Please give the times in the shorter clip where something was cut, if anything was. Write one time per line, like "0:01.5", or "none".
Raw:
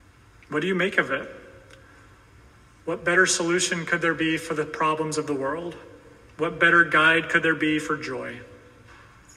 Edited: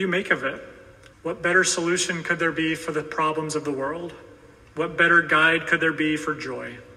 0:01.1